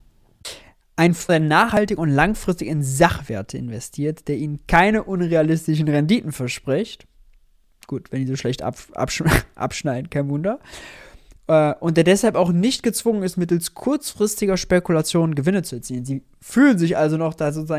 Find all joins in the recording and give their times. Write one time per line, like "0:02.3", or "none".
0:01.3